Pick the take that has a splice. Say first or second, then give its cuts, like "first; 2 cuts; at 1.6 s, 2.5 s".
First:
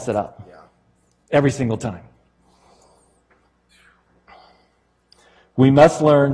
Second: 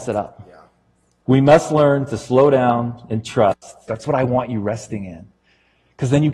second; 2 cuts; at 1.2 s, 3.9 s